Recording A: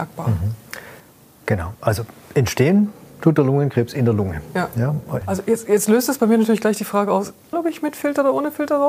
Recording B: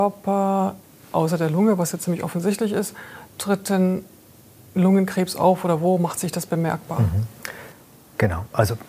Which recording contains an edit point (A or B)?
A